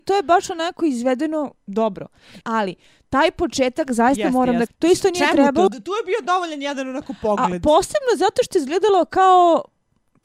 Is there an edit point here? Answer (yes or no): yes